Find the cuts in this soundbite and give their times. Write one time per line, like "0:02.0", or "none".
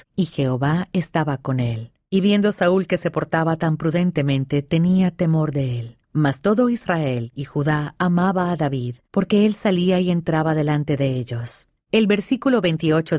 0:06.0
0:11.8